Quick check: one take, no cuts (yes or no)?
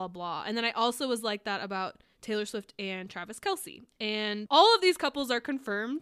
no